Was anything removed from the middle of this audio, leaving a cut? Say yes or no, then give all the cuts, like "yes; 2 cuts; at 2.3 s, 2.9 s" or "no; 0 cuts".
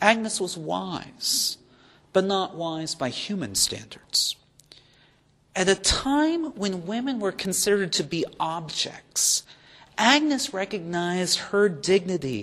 no; 0 cuts